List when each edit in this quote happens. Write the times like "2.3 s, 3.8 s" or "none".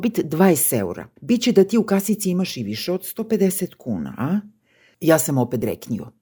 1.2 s